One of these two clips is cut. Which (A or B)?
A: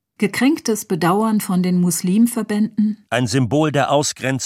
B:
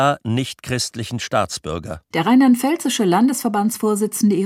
B